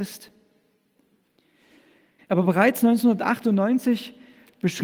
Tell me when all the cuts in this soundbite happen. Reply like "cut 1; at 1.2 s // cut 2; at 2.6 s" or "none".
cut 1; at 2.2 s

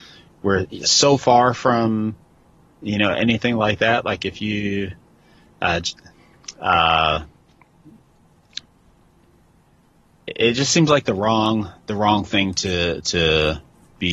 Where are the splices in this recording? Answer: none

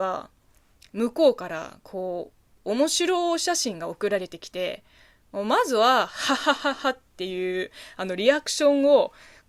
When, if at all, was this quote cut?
cut 1; at 6.4 s

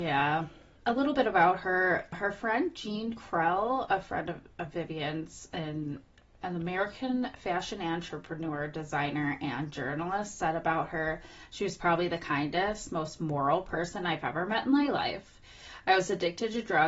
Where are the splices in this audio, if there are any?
none

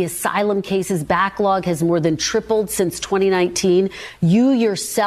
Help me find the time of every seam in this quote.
none

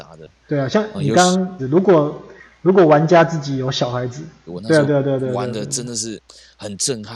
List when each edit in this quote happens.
cut 1; at 1.6 s // cut 2; at 4.5 s

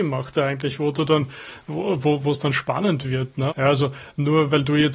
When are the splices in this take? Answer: cut 1; at 3.5 s

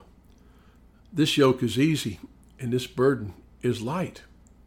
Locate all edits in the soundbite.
none

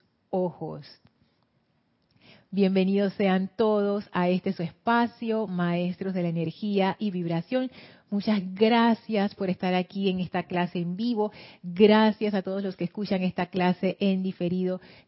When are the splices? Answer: none

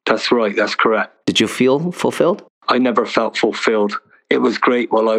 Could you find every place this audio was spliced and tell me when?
cut 1; at 1.2 s

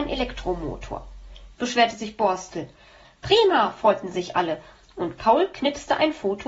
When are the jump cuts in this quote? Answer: cut 1; at 1.5 s // cut 2; at 3.0 s

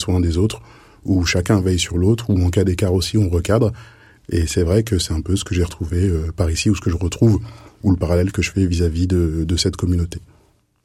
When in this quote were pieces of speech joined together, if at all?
none

